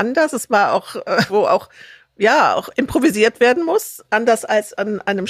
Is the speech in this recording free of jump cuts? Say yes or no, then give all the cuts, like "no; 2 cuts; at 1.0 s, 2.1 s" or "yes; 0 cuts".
no; 2 cuts; at 1.3 s, 4.1 s